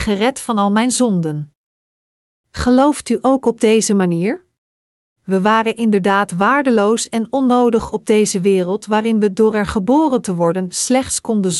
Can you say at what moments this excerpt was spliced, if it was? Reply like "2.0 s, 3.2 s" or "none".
5.2 s